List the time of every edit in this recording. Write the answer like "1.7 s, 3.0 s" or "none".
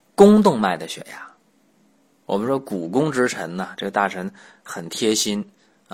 none